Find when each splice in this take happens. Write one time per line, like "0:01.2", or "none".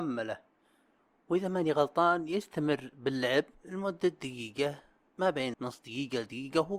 0:05.5